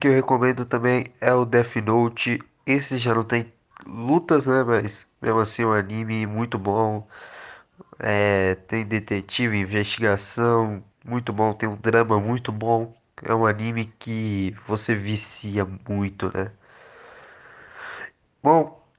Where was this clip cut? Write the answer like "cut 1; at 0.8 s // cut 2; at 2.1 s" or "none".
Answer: cut 1; at 10.9 s